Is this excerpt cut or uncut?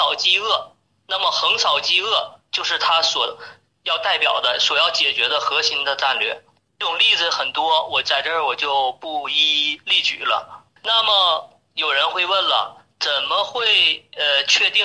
uncut